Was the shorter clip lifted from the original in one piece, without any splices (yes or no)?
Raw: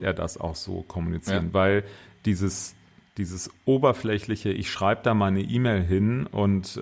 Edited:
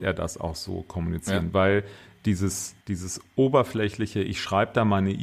no